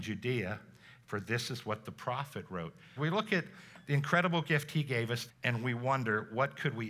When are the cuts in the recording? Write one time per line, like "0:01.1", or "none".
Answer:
0:03.0
0:05.3